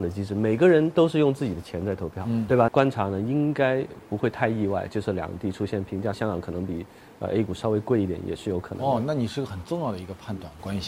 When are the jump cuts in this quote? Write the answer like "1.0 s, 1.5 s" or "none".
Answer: 2.7 s, 6.1 s